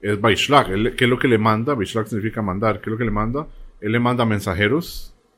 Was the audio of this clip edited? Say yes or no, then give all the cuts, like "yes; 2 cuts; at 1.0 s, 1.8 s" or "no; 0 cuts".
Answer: no; 0 cuts